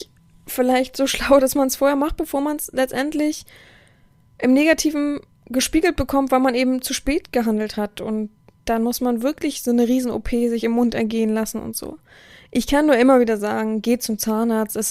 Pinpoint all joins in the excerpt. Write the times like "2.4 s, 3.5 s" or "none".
none

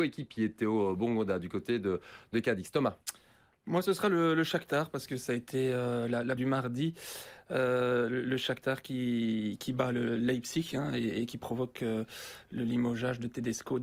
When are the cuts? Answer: 6.4 s

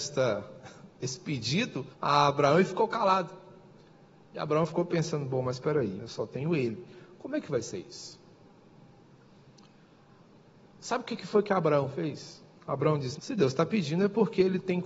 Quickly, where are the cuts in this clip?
1.9 s, 6.0 s, 13.2 s

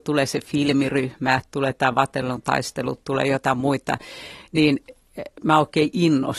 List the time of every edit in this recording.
none

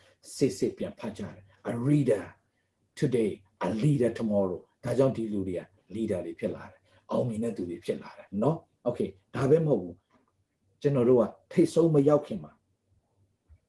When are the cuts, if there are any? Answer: 8.3 s

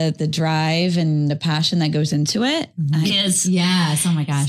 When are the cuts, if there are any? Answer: 3.0 s

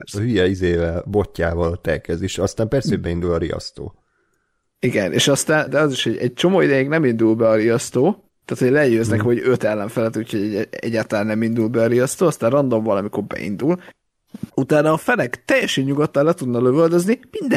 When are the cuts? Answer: 5.7 s, 14.5 s

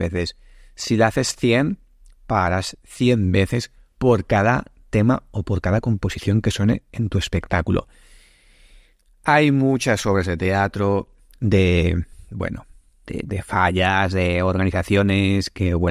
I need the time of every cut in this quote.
13.0 s

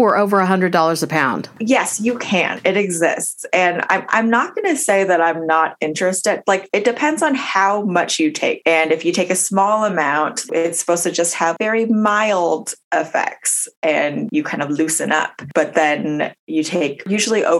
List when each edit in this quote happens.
10.5 s

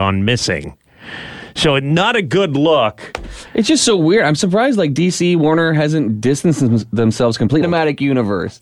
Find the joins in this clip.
3.5 s, 7.6 s

